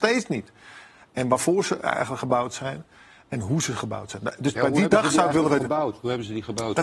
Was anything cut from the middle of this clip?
no; 0 cuts

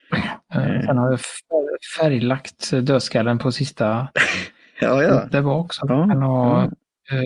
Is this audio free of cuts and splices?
no; 1 cut; at 5.3 s

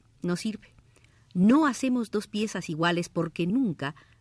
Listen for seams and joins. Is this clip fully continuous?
yes; 0 cuts

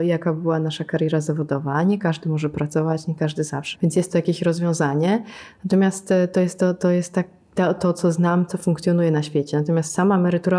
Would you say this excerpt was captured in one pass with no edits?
no; 1 cut; at 3.7 s

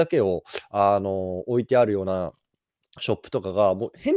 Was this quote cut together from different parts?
no; 0 cuts

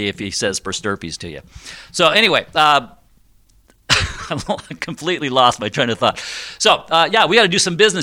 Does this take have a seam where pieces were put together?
no; 0 cuts

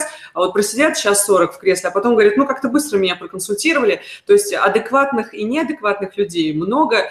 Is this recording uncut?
yes; 0 cuts

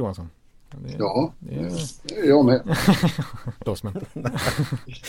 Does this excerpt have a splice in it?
yes; 1 cut; at 3.7 s

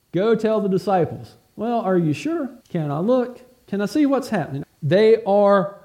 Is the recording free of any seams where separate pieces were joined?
no; 2 cuts; at 2.6 s, 4.6 s

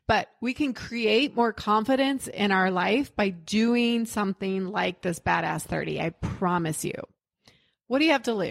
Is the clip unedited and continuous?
yes; 0 cuts

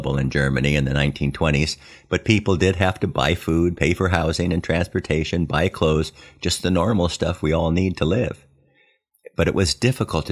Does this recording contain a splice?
no; 0 cuts

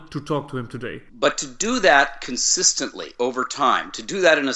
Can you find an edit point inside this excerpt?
yes; 1 cut; at 1.1 s

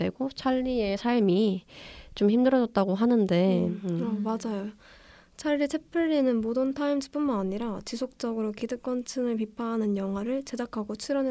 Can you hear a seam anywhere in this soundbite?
no; 0 cuts

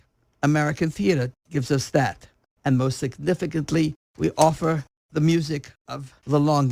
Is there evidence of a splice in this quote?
no; 0 cuts

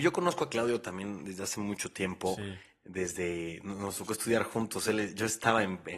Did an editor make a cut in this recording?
no; 0 cuts

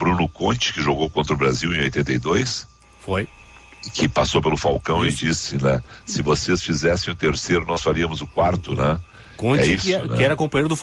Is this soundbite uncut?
yes; 0 cuts

